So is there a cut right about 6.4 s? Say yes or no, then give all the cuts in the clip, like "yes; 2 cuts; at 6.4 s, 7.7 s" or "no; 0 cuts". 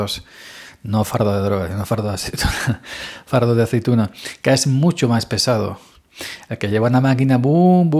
no; 0 cuts